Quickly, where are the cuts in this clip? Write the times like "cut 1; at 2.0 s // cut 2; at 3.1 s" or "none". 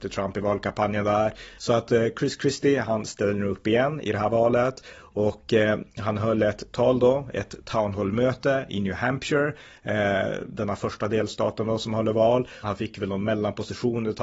cut 1; at 1.6 s // cut 2; at 12.6 s